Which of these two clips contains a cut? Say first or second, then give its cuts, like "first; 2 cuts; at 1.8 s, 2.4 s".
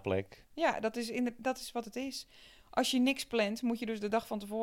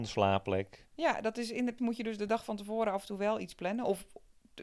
second; 1 cut; at 1.8 s